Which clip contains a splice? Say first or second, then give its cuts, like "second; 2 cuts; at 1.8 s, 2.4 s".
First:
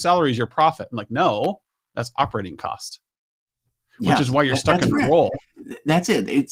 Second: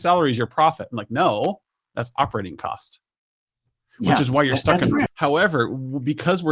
second; 1 cut; at 5.1 s